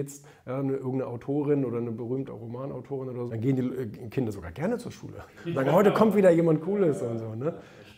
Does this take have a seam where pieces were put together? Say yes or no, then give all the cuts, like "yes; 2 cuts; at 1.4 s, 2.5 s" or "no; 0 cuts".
yes; 2 cuts; at 2.3 s, 3.3 s